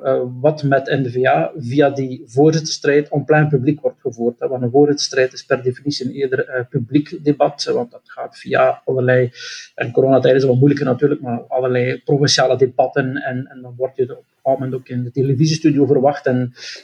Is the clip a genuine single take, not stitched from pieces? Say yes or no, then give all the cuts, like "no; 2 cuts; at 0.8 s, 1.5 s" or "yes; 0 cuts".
yes; 0 cuts